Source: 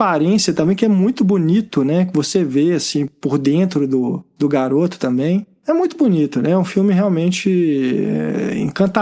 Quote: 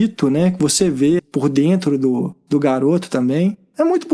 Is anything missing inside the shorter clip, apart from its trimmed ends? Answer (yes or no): yes